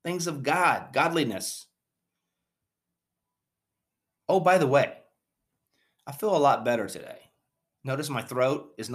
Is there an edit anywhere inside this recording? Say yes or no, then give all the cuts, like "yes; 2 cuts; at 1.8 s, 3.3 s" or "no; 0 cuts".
no; 0 cuts